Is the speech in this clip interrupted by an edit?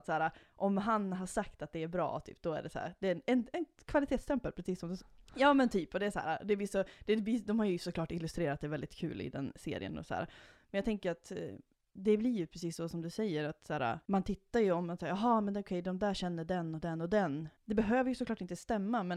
yes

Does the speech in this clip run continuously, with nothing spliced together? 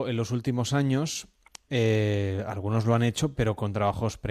yes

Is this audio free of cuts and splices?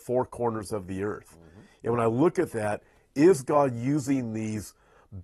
yes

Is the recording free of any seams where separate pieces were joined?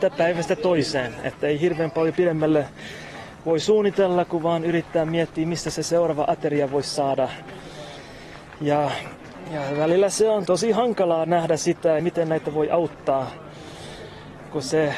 no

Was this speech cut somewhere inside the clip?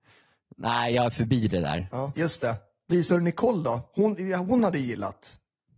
yes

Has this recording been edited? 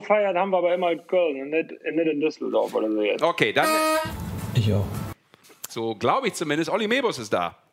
yes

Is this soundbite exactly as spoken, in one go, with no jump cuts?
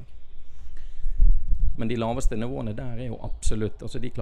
no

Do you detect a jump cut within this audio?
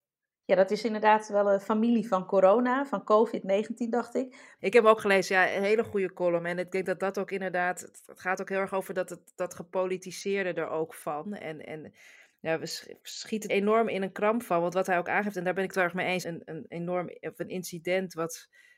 yes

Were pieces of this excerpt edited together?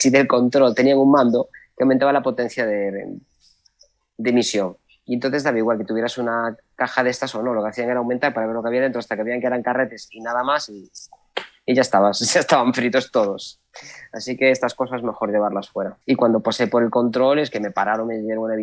yes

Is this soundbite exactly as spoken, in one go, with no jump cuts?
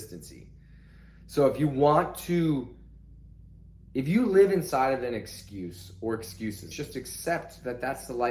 no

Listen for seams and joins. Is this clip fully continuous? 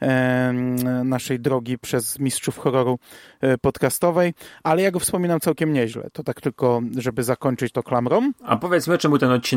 yes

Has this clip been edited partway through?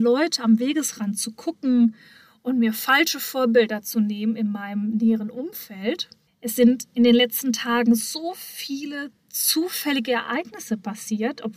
yes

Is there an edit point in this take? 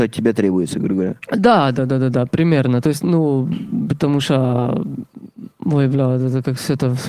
no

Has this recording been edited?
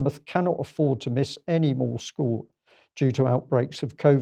no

